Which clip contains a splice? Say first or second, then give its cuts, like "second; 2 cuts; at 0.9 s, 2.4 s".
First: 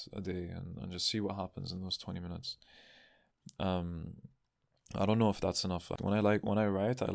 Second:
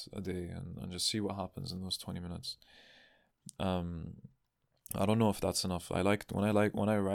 first; 1 cut; at 5.9 s